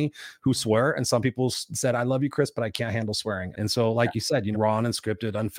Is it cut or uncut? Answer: cut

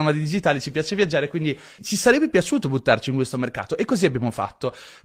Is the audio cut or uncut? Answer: cut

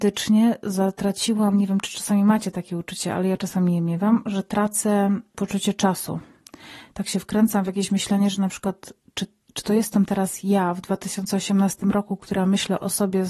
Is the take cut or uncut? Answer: uncut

